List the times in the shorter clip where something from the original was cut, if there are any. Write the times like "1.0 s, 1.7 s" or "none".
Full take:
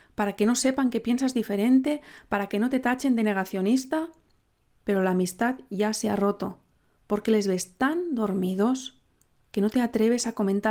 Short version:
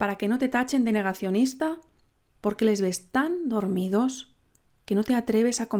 2.3 s